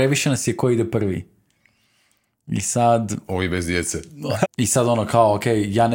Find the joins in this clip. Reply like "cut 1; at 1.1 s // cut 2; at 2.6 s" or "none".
cut 1; at 4.4 s